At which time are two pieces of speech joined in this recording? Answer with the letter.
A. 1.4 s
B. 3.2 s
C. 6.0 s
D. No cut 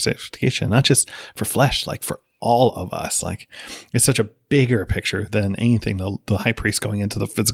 D